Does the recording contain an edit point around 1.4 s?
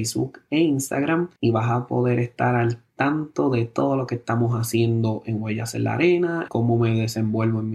yes; 2 cuts; at 1.4 s, 6.5 s

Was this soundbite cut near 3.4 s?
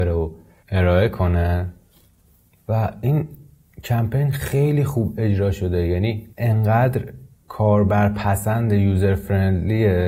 no; 1 cut; at 6.3 s

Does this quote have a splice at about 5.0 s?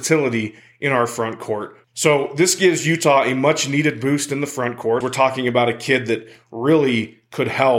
yes; 2 cuts; at 1.8 s, 5.0 s

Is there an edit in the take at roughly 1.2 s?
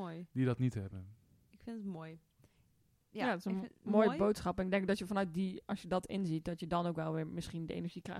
no; 0 cuts

